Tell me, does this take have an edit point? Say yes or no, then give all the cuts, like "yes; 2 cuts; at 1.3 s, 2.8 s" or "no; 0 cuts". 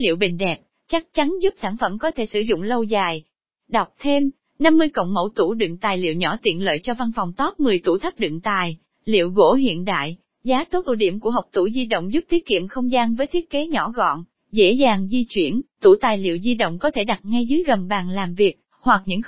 no; 0 cuts